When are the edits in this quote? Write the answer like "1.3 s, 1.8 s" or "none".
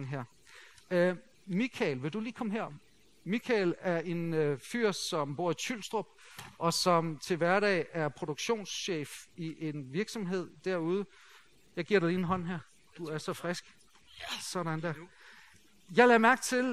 none